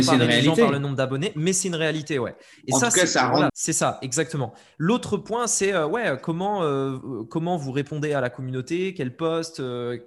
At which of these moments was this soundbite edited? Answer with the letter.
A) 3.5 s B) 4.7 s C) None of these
A